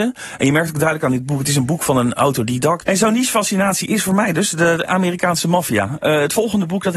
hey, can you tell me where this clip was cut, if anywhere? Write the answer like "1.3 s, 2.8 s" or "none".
2.8 s